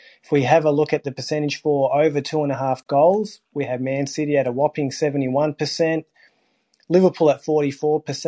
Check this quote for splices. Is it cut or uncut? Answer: uncut